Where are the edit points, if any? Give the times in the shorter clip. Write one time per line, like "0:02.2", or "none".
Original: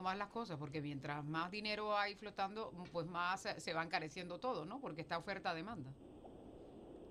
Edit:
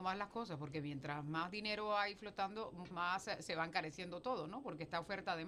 0:02.9

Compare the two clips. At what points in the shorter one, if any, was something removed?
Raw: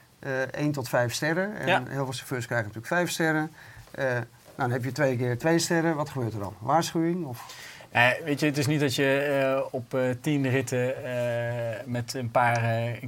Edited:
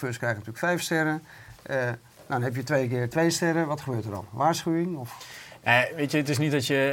none

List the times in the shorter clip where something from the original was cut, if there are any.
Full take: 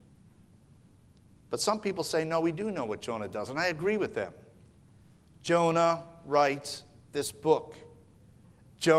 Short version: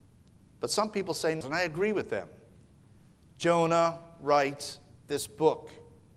0:01.4

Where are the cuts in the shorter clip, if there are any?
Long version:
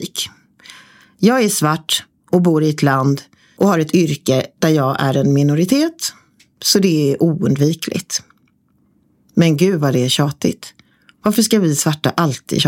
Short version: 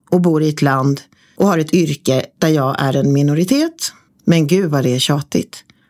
0:04.1

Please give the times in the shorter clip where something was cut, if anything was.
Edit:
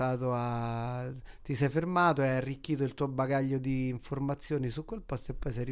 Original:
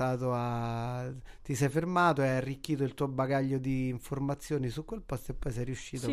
none

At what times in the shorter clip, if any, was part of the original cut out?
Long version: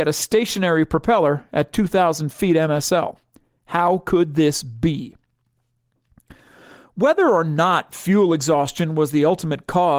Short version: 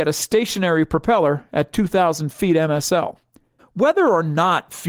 0:03.6

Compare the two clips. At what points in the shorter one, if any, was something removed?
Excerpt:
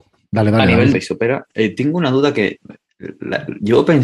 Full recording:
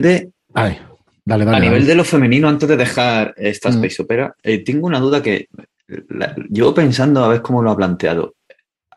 0:00.9

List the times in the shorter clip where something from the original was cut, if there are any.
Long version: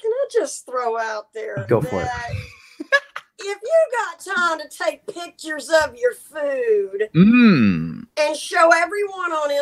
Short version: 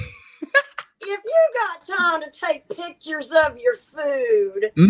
none

